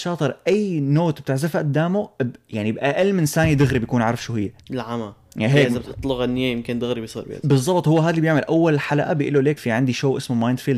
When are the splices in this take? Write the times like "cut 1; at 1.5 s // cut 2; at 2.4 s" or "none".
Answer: cut 1; at 4.6 s // cut 2; at 9.6 s